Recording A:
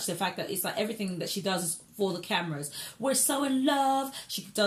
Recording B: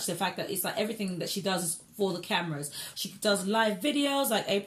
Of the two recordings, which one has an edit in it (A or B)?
B